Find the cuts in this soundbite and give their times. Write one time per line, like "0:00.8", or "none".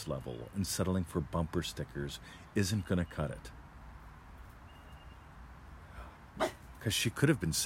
0:06.3